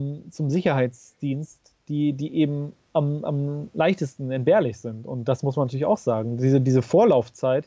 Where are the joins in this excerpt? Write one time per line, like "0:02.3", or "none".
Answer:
none